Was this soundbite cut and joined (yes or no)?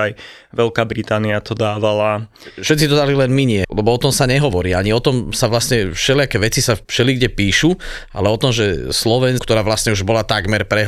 yes